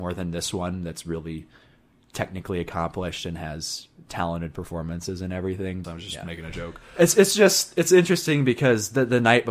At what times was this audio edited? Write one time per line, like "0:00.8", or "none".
0:05.8